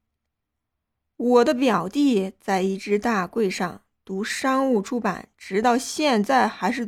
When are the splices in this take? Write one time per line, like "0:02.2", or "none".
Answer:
none